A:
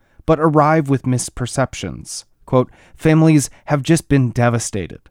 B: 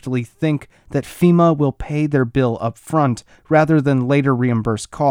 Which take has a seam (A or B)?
A